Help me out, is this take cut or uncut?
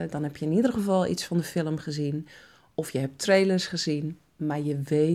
uncut